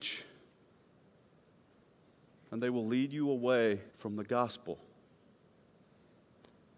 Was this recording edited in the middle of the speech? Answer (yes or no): yes